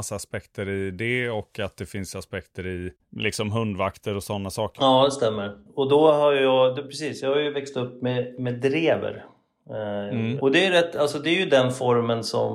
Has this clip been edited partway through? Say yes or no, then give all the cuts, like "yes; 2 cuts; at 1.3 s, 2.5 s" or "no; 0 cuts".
yes; 2 cuts; at 4.8 s, 10.4 s